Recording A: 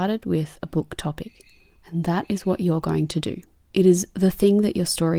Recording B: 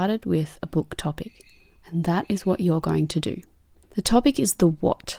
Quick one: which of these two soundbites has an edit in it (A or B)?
A